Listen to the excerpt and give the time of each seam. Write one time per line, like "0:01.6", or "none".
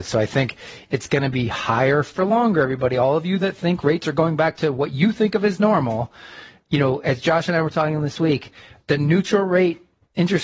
none